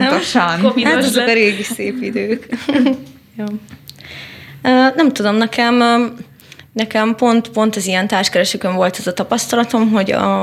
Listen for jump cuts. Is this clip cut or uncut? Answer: uncut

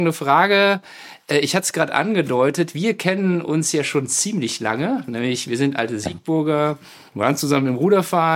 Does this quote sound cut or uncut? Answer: uncut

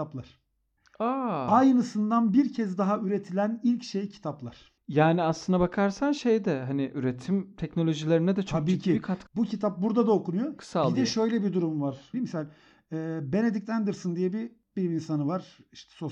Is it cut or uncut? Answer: cut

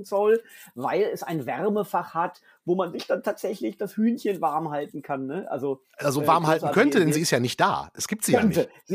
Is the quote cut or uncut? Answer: uncut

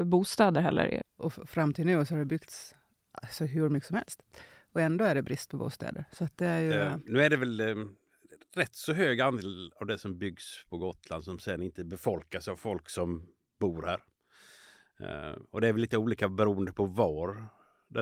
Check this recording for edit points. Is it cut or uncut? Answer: cut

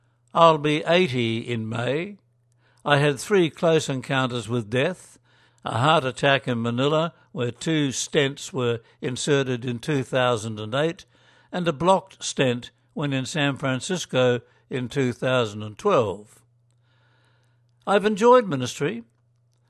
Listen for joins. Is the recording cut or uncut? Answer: cut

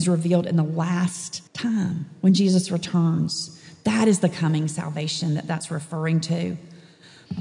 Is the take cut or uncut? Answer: cut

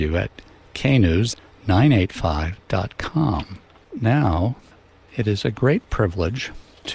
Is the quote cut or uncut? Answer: cut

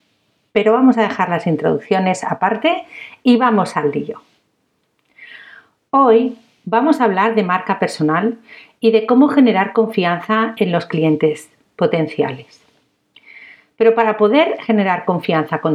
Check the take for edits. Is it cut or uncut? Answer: uncut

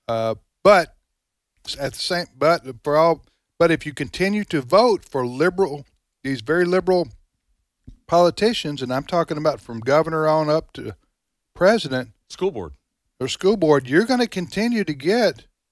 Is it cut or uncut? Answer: uncut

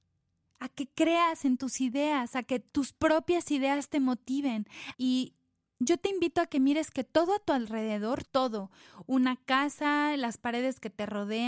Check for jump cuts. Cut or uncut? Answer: cut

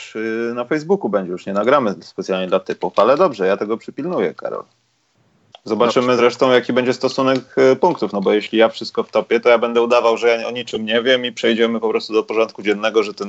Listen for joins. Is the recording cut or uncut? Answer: uncut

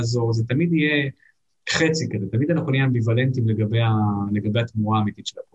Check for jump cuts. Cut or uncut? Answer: uncut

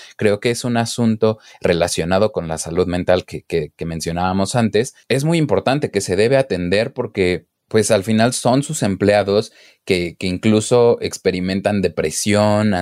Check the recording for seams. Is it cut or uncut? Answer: cut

